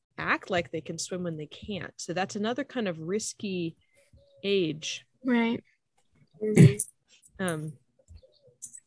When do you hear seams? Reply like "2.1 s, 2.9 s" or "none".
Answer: 5.1 s